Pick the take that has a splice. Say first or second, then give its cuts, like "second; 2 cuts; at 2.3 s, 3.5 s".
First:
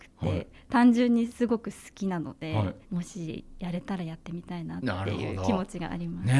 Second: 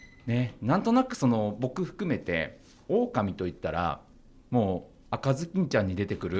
first; 1 cut; at 2.8 s